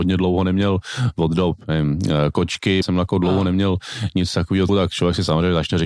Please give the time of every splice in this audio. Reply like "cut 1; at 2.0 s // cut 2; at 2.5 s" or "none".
cut 1; at 2.8 s // cut 2; at 4.7 s